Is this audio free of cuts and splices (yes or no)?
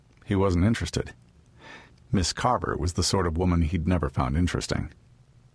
no